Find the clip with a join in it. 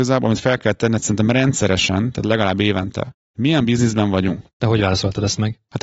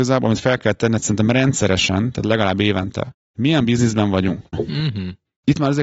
second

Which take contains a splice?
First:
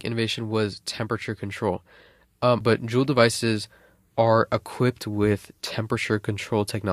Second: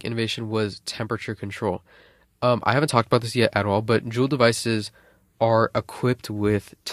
first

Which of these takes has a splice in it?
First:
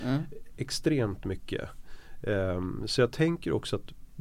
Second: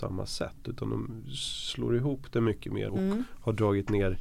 second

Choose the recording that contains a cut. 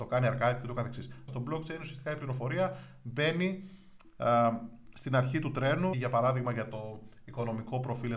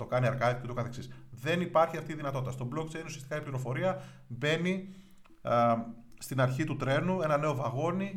first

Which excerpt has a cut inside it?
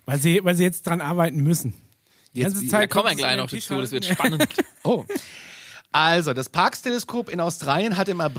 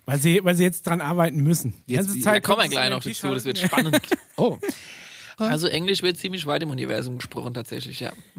second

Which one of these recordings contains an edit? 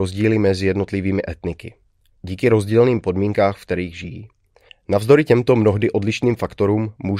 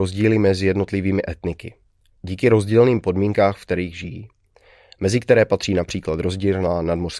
first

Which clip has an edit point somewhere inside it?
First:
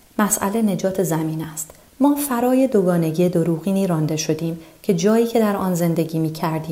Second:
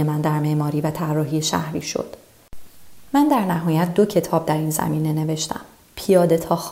first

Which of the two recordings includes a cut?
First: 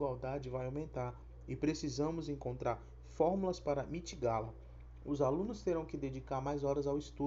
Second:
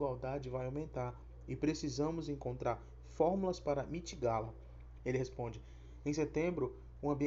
second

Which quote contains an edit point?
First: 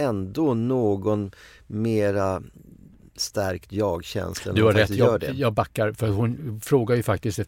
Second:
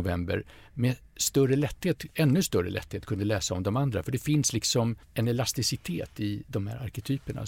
second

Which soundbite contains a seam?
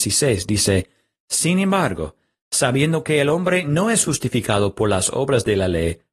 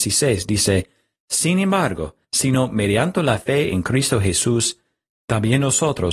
second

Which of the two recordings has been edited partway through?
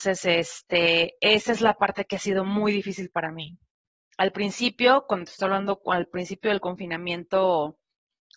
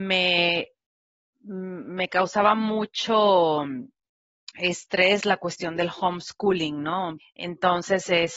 second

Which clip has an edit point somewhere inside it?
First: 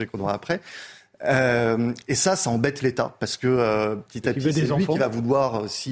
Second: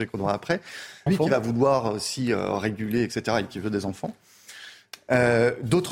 second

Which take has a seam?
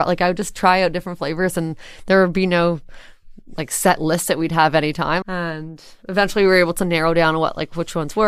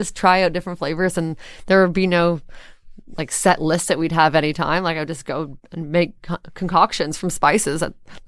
first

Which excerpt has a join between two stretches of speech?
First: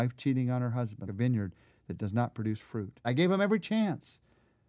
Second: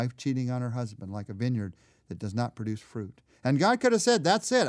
first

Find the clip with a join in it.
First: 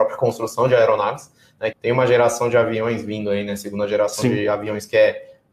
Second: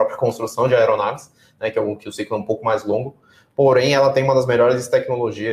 first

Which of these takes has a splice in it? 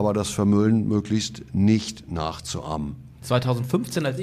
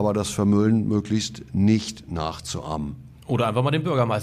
first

